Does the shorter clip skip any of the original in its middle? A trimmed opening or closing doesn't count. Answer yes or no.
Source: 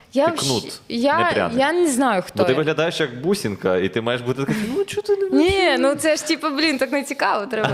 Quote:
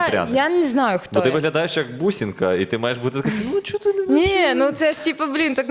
no